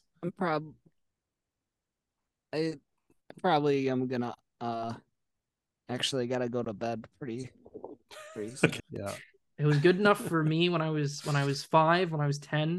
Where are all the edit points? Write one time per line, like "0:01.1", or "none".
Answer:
0:08.8